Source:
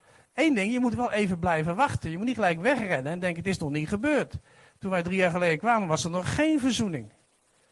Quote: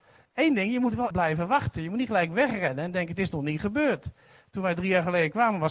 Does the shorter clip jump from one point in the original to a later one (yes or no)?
yes